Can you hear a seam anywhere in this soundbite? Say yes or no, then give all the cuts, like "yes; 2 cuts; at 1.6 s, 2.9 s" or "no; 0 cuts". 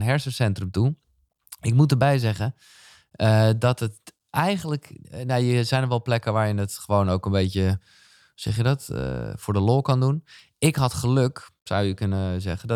no; 0 cuts